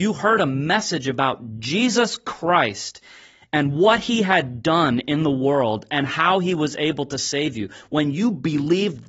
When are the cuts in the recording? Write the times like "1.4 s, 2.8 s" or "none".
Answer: none